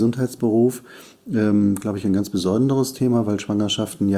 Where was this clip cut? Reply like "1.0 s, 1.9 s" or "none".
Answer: none